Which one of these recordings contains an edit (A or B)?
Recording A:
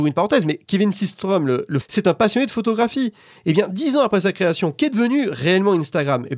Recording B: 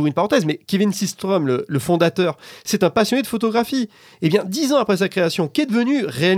A